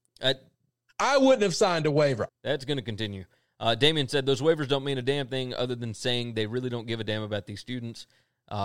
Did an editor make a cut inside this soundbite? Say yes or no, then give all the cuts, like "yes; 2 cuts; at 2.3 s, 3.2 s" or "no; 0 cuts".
yes; 1 cut; at 2.3 s